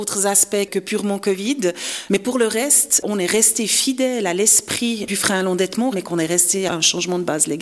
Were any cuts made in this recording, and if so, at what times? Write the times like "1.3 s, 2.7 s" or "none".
2.1 s, 5.9 s